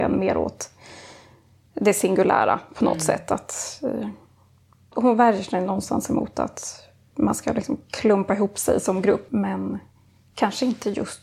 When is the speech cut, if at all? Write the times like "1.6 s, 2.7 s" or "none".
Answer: 4.9 s, 9.3 s